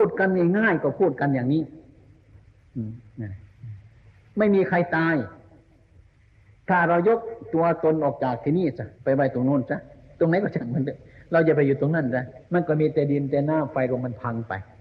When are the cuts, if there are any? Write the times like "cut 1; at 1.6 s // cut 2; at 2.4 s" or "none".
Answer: cut 1; at 8.9 s // cut 2; at 12.4 s